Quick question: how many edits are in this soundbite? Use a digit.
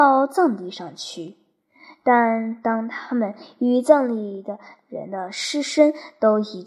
0